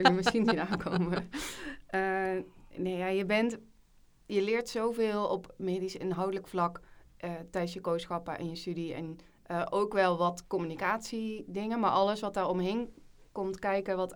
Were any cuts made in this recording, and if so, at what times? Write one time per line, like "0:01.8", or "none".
none